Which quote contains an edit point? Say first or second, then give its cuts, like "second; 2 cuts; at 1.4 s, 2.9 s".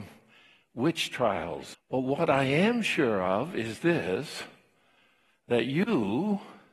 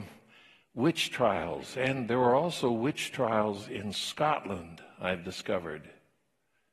first; 1 cut; at 1.7 s